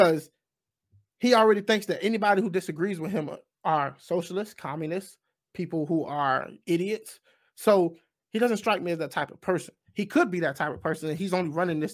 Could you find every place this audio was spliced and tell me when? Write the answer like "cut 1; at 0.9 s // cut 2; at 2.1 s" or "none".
none